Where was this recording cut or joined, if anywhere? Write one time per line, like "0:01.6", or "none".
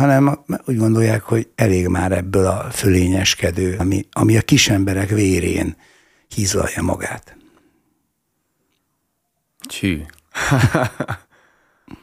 0:03.8